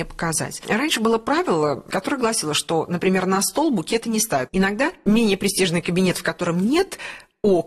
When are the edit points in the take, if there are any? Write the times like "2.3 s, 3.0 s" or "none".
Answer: 4.5 s